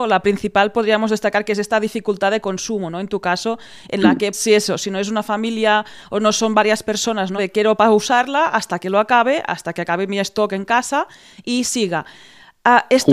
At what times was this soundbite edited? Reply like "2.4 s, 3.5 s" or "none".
4.3 s, 7.4 s

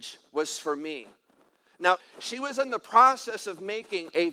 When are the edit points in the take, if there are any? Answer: 2.0 s

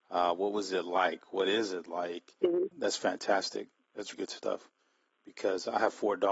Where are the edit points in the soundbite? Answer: 2.7 s, 4.1 s

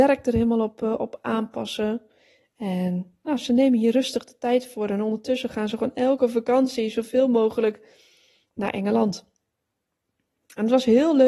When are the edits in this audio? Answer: none

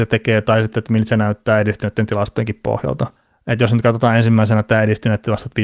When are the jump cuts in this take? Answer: none

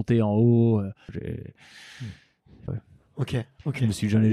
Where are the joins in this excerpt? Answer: 1.1 s, 2.7 s

